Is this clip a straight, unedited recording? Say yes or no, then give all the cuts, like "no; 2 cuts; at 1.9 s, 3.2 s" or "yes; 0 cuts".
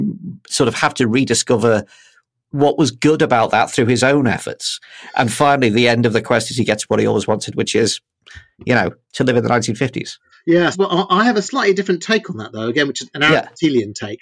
no; 1 cut; at 10.7 s